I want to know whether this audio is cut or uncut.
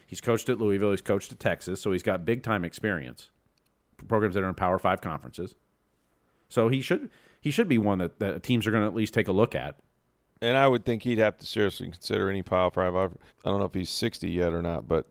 cut